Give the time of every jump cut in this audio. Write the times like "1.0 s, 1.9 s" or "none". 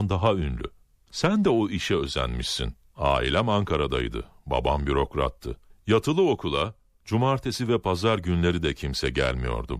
2.9 s

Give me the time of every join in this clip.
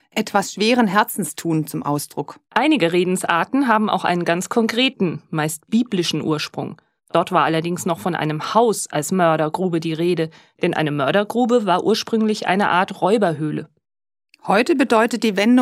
2.4 s, 7.0 s

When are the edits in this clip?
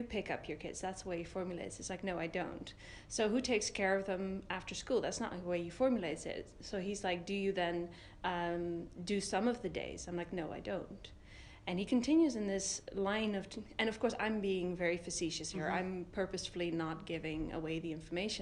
none

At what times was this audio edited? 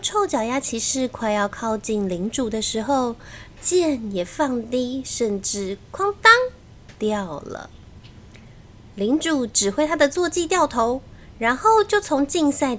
3.5 s

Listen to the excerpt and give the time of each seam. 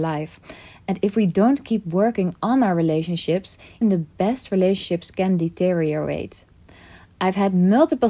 3.8 s

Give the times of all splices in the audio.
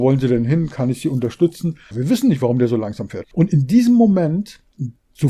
1.9 s, 3.2 s

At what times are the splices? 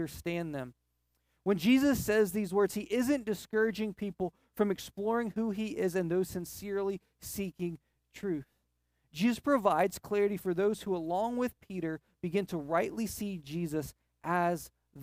none

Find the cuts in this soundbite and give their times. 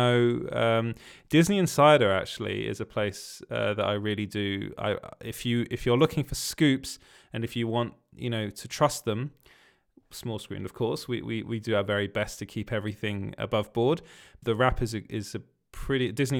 14.4 s

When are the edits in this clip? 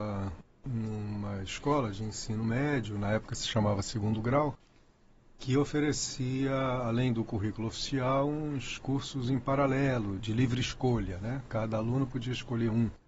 none

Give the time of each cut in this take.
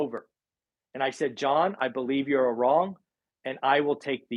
none

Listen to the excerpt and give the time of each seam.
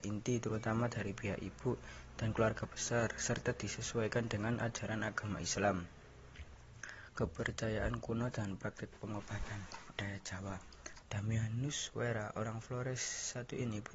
11.0 s

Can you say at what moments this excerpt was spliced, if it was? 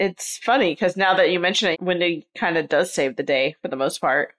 1.7 s

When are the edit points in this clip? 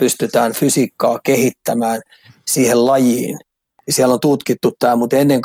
3.8 s

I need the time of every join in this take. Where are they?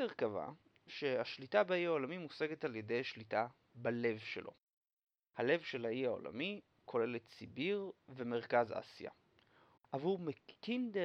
9.8 s

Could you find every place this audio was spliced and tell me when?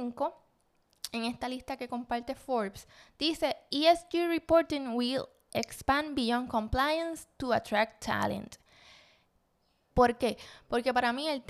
9.9 s

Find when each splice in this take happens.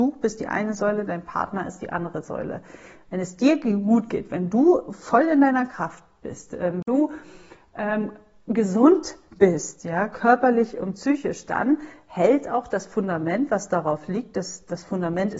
none

